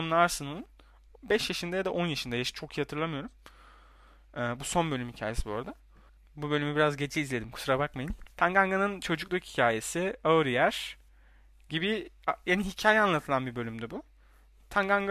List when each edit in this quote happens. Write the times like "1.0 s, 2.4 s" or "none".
6.2 s, 8.3 s